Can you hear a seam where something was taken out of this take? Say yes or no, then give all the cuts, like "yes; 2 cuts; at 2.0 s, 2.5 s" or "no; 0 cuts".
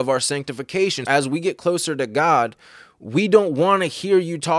yes; 1 cut; at 1.0 s